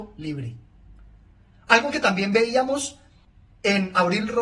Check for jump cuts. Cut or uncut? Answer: uncut